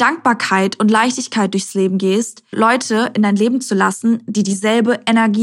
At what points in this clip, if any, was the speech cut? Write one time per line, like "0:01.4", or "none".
0:02.5